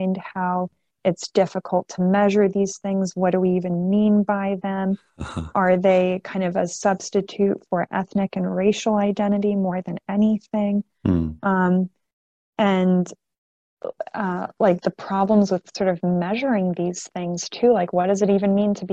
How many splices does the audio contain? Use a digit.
1